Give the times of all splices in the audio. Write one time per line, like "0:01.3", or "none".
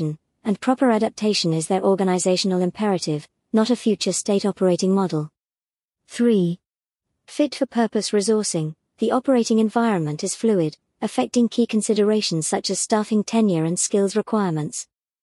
none